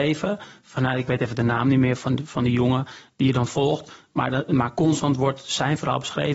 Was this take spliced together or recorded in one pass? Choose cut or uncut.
uncut